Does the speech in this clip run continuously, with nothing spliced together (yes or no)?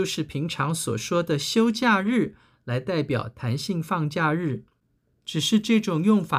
yes